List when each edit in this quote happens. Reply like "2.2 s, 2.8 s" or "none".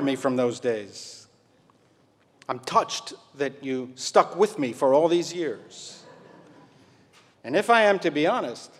7.3 s